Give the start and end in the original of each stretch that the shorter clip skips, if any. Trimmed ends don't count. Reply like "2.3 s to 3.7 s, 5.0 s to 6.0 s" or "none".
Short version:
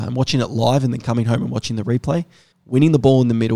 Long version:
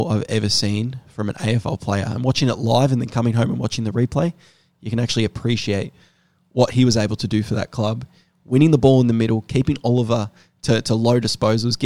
4.6 s to 8.3 s